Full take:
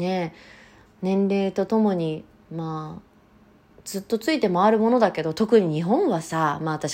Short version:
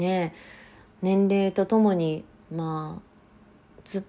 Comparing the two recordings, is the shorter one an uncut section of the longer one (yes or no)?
yes